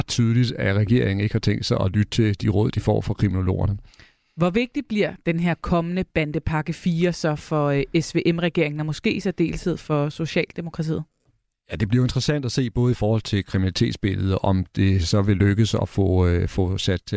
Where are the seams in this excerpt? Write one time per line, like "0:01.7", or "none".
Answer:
none